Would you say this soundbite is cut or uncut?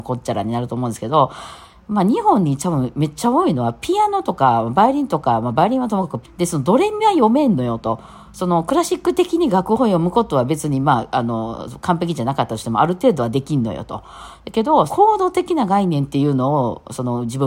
cut